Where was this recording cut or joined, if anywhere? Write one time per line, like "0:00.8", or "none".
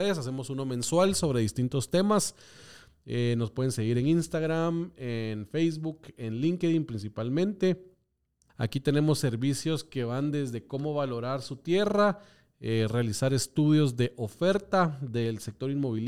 0:08.5